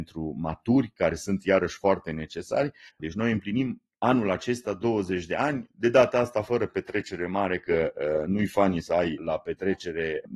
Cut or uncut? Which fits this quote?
cut